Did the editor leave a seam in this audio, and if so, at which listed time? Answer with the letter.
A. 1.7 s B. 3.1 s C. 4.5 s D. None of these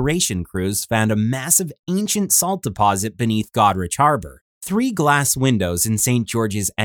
C